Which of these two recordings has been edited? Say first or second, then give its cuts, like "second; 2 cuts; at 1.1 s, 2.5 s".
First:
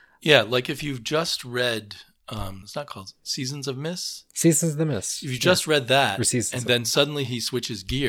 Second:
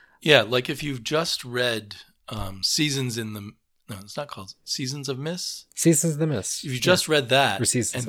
first; 1 cut; at 2.6 s